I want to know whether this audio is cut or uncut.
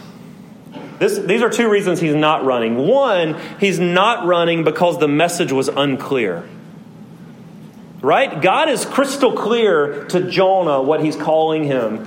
uncut